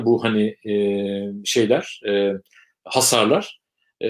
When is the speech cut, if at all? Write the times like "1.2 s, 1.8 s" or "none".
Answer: none